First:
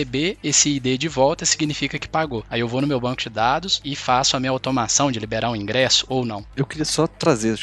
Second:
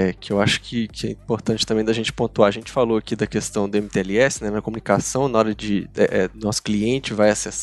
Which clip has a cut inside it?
first; 2 cuts; at 3.8 s, 6.5 s

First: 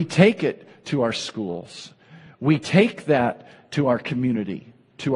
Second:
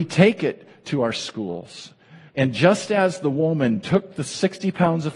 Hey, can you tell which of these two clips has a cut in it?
second; 1 cut; at 2.3 s

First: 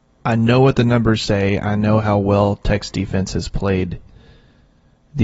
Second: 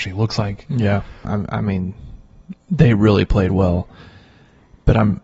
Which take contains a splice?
second; 2 cuts; at 1.2 s, 2.6 s

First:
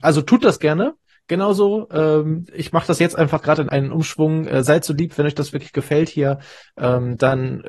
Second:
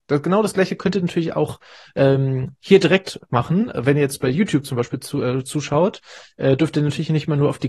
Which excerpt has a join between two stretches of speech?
first; 1 cut; at 3.7 s

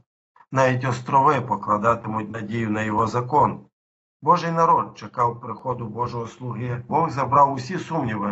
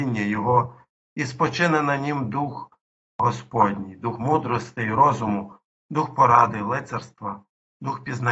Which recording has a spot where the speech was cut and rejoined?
first; 2 cuts; at 4.1 s, 6.9 s

